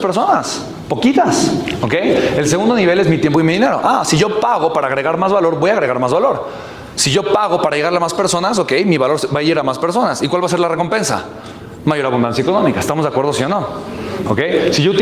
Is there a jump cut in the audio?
no; 0 cuts

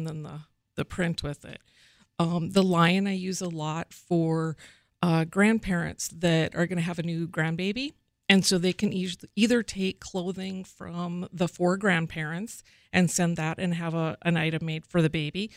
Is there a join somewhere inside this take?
no; 0 cuts

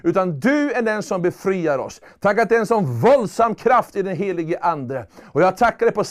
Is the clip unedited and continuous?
yes; 0 cuts

